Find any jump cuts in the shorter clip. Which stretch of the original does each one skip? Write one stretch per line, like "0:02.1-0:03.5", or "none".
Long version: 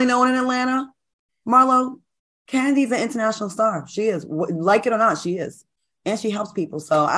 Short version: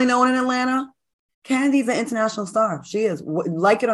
0:01.3-0:02.4